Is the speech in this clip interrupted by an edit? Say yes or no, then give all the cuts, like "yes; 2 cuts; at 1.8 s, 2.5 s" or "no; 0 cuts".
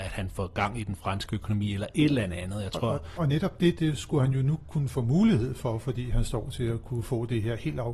yes; 1 cut; at 3.2 s